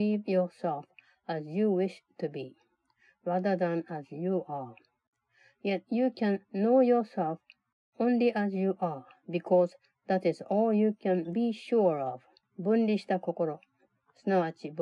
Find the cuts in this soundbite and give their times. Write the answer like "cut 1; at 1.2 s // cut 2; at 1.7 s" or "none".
cut 1; at 12.4 s

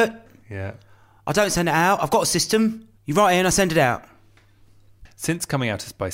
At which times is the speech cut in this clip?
cut 1; at 3.0 s // cut 2; at 5.1 s

